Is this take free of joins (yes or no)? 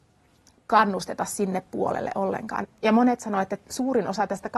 no